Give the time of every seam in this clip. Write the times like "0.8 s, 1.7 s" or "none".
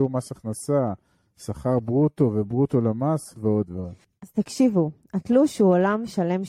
3.3 s